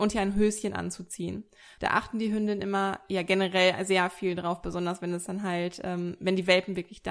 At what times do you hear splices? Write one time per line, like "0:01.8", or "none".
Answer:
0:01.8

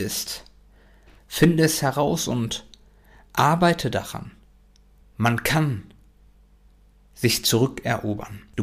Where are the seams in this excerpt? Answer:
0:01.2
0:05.0

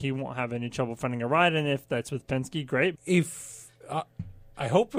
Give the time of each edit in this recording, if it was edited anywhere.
0:02.9

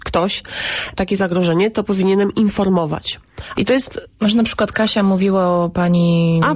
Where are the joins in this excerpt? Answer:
0:01.0
0:03.5

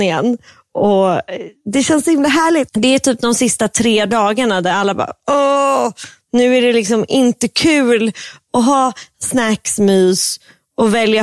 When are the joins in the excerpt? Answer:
0:02.7

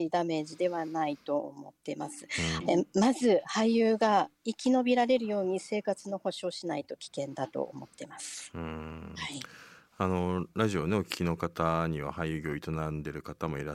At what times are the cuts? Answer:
0:02.6

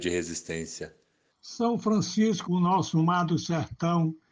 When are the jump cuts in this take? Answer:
0:01.3
0:02.4

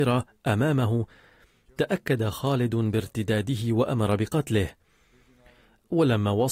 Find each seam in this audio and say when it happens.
none

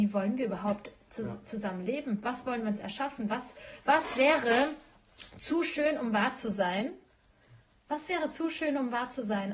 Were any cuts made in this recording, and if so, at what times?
none

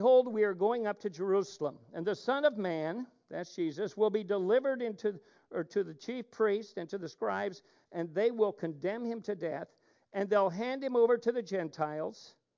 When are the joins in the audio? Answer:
none

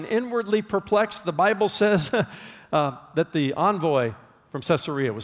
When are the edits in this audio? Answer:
none

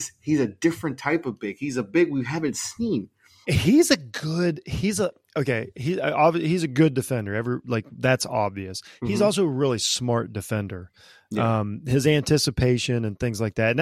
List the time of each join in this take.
0:03.4

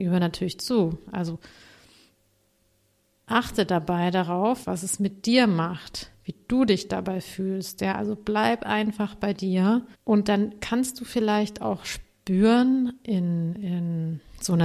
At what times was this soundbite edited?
0:04.6
0:09.9

